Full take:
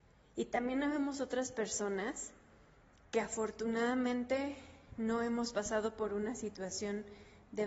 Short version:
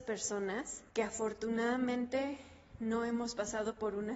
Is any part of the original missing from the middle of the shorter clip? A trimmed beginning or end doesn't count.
yes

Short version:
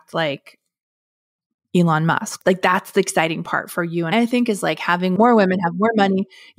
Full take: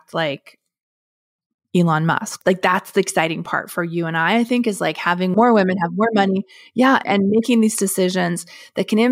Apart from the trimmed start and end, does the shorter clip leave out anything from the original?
yes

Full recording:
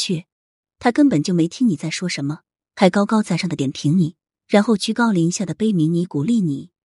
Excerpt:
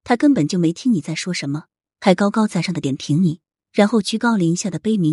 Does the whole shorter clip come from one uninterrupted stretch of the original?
yes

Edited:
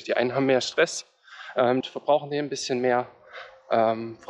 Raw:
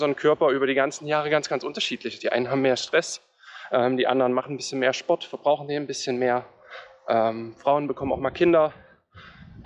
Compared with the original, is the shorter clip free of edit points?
no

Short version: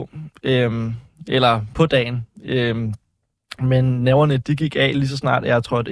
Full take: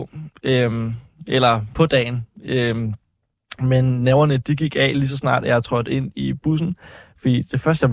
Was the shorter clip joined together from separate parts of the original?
no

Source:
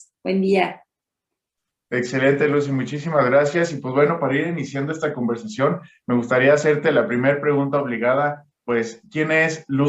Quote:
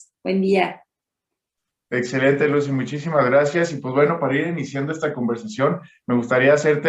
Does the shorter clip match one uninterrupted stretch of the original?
yes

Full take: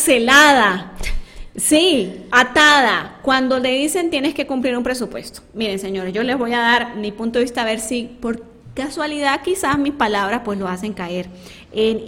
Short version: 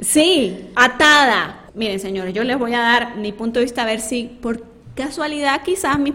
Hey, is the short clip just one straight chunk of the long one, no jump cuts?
no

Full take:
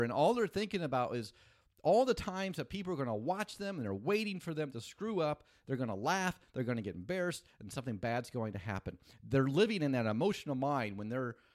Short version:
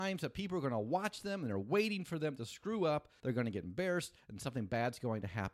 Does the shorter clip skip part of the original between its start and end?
yes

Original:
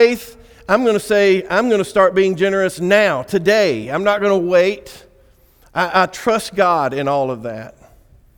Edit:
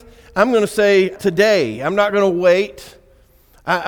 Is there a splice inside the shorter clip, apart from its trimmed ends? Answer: yes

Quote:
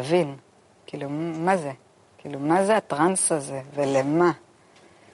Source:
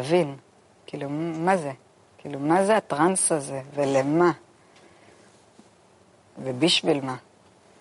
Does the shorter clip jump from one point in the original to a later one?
no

